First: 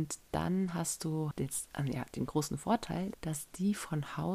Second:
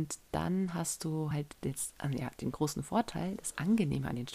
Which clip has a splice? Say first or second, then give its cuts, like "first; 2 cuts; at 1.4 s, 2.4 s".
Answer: first; 2 cuts; at 1.3 s, 3.1 s